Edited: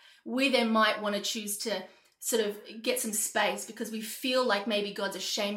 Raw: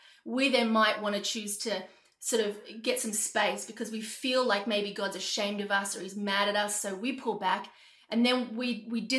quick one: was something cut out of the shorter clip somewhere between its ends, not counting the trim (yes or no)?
no